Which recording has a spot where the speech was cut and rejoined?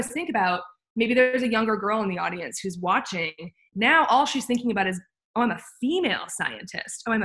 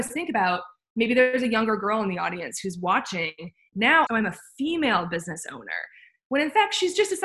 second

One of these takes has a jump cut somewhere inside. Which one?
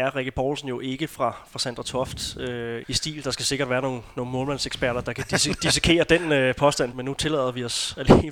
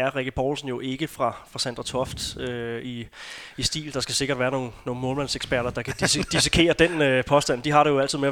first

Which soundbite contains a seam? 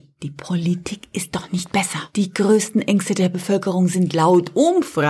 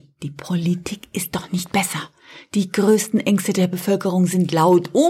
first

